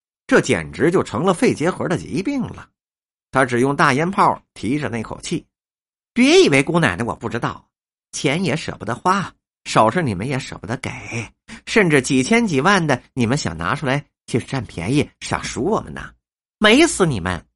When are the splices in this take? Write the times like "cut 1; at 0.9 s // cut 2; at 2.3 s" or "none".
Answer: cut 1; at 6.0 s